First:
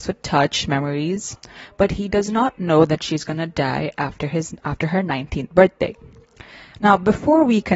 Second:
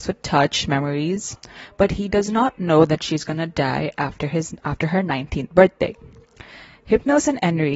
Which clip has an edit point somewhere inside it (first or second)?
first